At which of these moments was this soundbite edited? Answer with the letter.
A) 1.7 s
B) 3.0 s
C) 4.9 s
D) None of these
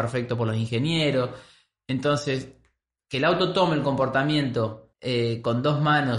C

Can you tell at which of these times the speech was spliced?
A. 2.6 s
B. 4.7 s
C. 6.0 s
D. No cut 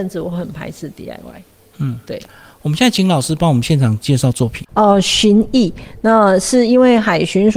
B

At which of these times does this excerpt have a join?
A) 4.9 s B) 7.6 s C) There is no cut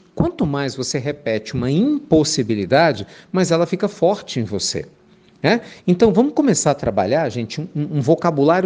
C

